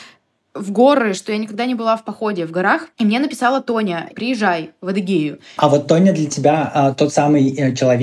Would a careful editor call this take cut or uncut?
cut